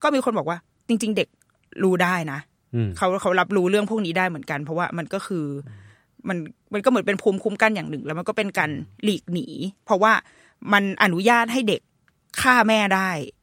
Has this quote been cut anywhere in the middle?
no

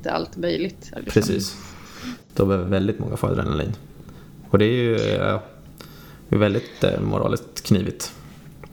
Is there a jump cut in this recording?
yes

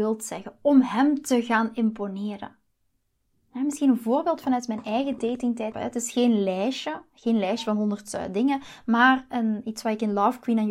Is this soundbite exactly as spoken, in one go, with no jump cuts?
no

